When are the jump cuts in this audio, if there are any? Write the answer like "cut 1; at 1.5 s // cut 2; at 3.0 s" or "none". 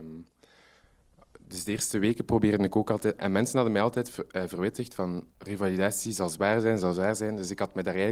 cut 1; at 3.2 s // cut 2; at 5.3 s